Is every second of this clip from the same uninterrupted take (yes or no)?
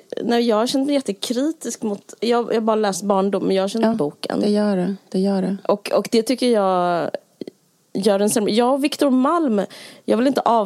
no